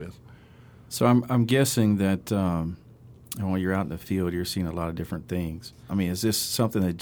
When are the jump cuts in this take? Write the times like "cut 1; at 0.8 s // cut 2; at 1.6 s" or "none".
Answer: cut 1; at 5.9 s